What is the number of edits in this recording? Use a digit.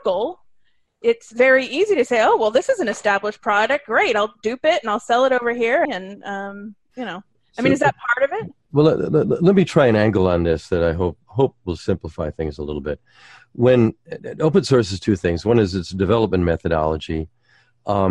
1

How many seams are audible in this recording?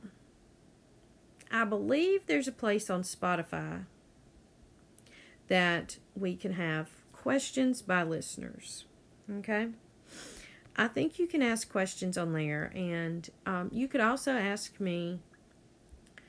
0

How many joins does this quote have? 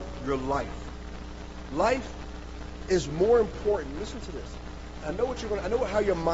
0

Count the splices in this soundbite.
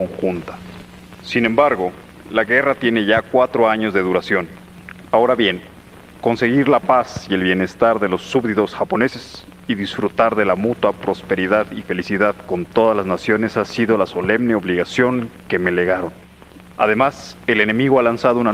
3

